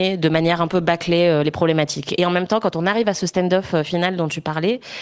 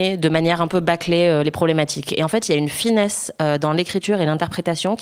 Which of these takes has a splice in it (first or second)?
first